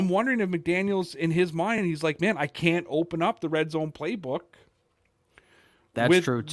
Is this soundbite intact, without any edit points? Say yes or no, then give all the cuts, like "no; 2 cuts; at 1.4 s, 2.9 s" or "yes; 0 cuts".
yes; 0 cuts